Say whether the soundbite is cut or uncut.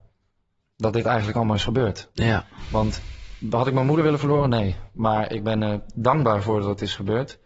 uncut